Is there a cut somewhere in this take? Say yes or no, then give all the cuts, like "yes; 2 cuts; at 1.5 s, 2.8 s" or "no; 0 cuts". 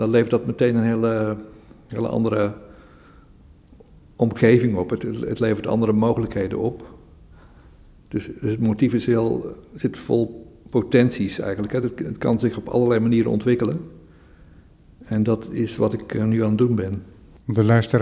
no; 0 cuts